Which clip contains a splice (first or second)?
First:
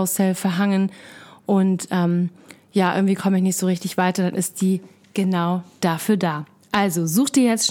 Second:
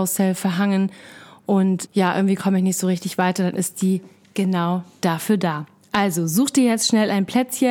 second